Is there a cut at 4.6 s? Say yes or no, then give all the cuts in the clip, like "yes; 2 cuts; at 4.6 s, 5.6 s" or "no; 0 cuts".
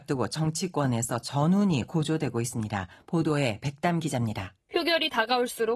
yes; 1 cut; at 4.6 s